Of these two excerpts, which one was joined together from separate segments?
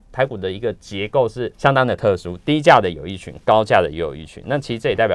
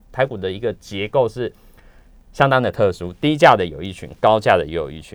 first; 1 cut; at 1.6 s

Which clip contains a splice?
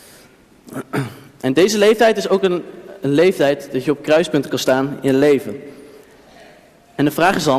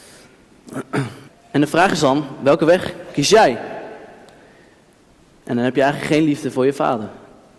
second; 2 cuts; at 1.3 s, 5.4 s

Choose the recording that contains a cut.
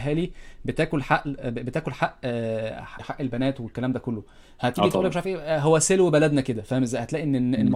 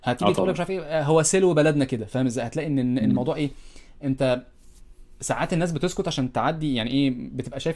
first; 1 cut; at 3.0 s

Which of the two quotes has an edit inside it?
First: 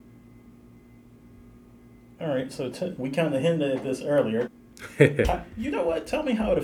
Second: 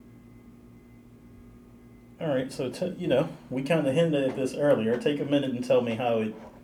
first; 2 cuts; at 3.0 s, 4.5 s

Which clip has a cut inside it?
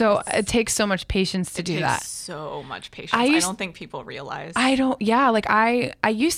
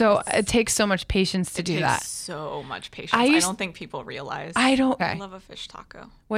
second; 1 cut; at 5.0 s

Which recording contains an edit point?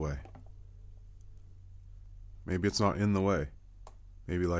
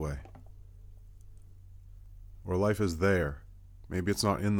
first; 1 cut; at 2.4 s

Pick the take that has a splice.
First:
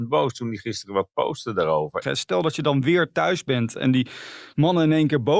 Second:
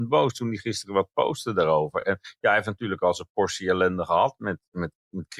first; 1 cut; at 2.0 s

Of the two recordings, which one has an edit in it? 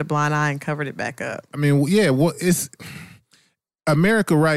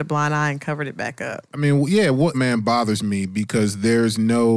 second; 1 cut; at 2.3 s

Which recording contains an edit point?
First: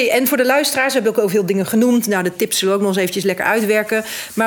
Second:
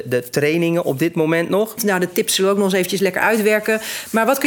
second; 1 cut; at 1.8 s

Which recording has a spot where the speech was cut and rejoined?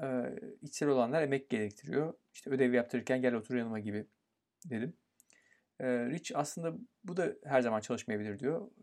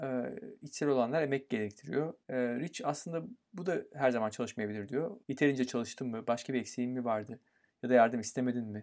second; 2 cuts; at 2.2 s, 5.2 s

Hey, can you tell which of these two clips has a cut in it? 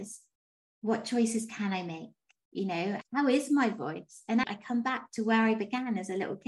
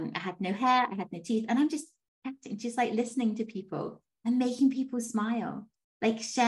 first; 2 cuts; at 3.0 s, 4.4 s

